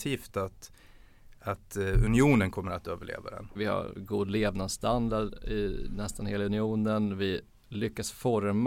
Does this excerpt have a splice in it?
yes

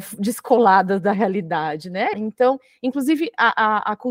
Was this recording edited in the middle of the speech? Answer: yes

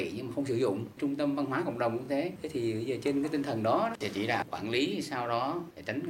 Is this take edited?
no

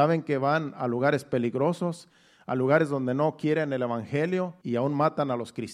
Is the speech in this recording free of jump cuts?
no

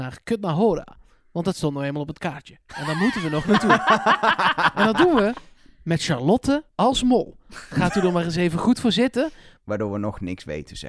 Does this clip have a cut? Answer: yes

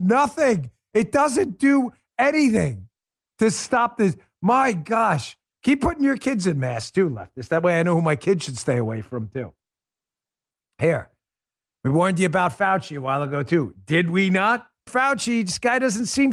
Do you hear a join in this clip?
yes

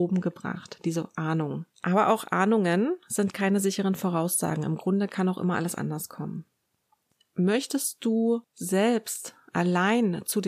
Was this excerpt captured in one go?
no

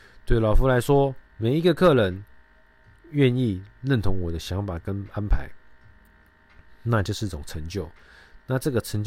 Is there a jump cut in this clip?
yes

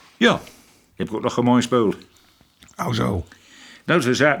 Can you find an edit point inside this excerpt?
yes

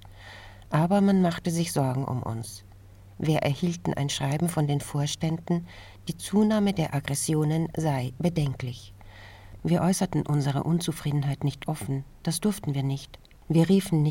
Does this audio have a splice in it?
yes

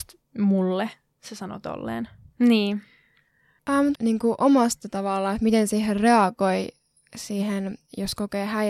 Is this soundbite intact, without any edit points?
no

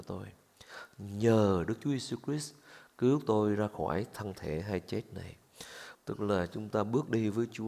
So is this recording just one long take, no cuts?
no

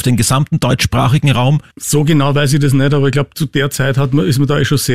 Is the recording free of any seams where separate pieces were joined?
no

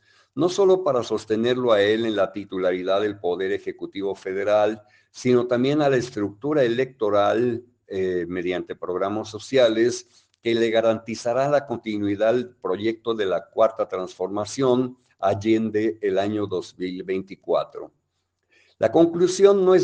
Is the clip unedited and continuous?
yes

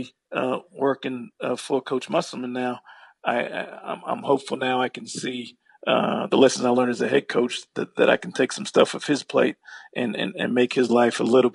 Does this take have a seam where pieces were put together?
no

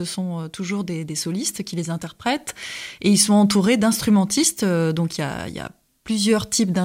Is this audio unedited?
yes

